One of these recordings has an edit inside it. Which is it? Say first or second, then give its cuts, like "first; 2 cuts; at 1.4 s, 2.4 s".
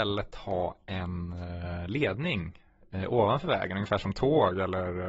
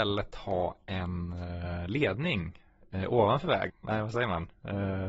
second; 1 cut; at 3.7 s